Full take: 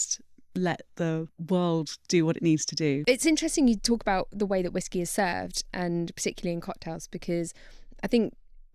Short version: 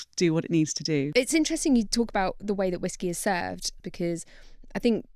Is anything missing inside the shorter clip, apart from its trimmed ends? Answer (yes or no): yes